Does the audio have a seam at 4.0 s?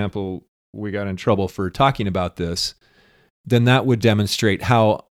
yes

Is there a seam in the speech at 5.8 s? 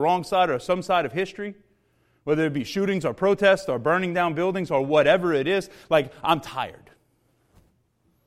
no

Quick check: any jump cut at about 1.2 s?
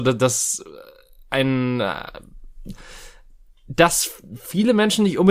no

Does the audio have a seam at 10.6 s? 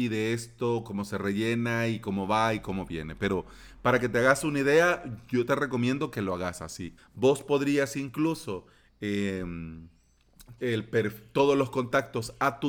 yes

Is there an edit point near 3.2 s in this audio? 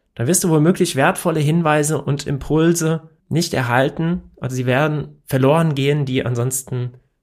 yes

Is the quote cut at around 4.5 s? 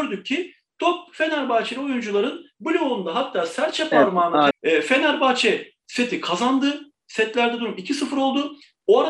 yes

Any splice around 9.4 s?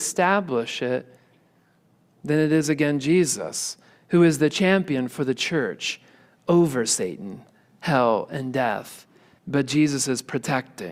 yes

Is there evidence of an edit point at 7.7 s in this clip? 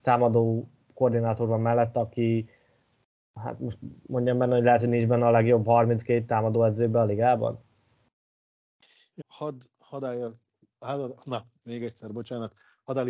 no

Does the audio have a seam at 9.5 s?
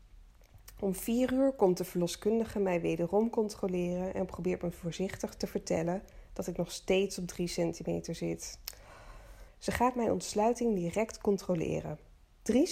yes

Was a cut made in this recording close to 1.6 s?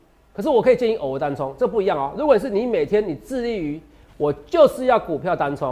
no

